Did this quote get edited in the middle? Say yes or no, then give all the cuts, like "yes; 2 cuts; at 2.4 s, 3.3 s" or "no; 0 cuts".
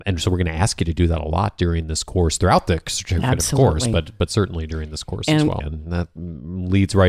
yes; 1 cut; at 5.6 s